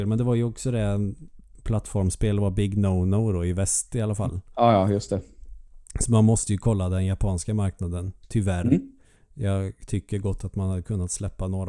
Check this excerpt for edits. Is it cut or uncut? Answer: uncut